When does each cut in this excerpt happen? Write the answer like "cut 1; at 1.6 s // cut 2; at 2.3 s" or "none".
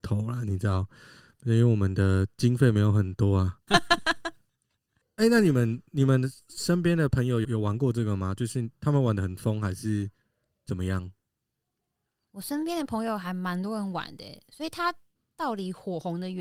cut 1; at 3.7 s // cut 2; at 7.4 s